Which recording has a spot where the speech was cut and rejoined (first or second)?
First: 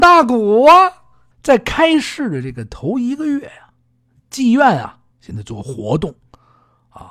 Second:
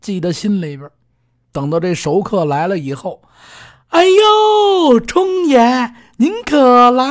first